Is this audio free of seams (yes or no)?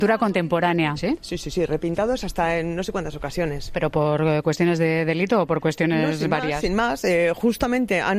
no